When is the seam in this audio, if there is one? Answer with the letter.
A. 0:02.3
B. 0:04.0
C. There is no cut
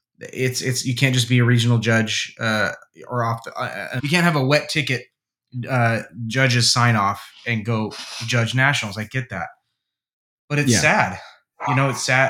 B